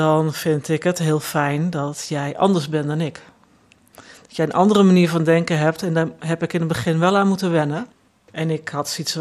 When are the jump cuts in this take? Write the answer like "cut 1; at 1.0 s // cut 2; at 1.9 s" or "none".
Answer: cut 1; at 8.3 s